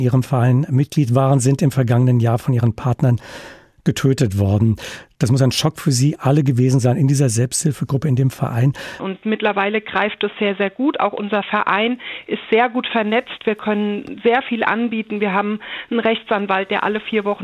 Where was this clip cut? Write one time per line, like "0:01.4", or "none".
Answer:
0:09.0